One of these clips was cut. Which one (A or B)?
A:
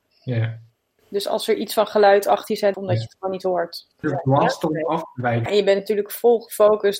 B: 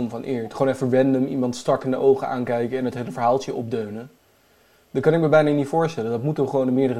A